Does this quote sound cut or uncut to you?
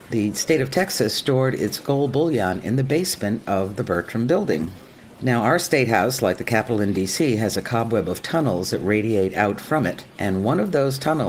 uncut